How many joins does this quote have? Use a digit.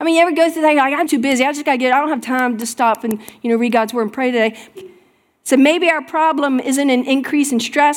2